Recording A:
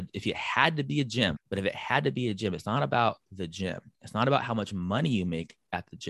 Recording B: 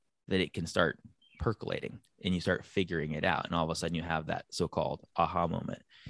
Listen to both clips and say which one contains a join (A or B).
A